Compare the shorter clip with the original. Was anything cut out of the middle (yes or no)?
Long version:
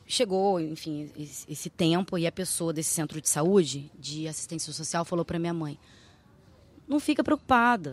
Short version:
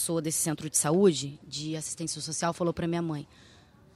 no